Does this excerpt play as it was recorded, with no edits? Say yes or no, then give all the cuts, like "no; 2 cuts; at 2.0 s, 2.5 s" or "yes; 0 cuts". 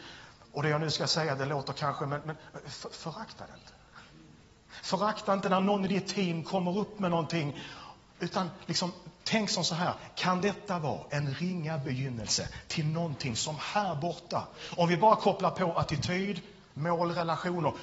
no; 1 cut; at 2.2 s